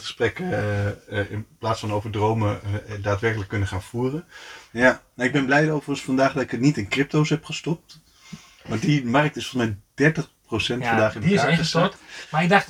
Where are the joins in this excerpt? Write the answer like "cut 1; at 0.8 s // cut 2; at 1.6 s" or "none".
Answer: cut 1; at 4.7 s